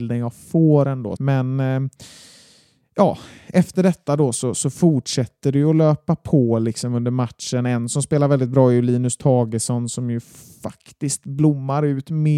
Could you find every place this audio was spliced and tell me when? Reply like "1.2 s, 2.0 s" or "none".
1.2 s

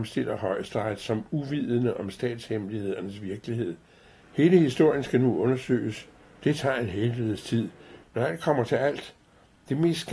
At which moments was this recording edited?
4.2 s, 8.0 s

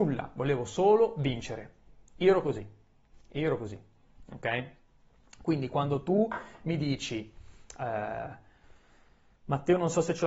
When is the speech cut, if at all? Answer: none

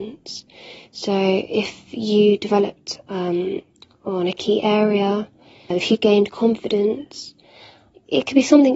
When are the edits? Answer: 5.7 s

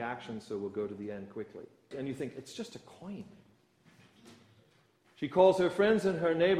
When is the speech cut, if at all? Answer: 1.9 s

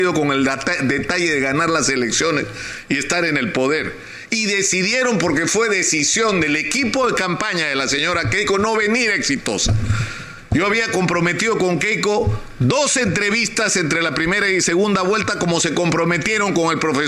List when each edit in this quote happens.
none

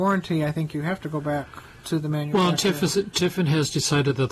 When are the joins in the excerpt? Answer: none

